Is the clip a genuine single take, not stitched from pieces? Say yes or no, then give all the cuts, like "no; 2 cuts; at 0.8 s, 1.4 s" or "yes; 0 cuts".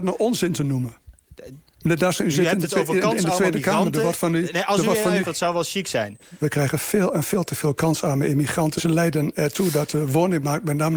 no; 3 cuts; at 5.2 s, 6.4 s, 8.8 s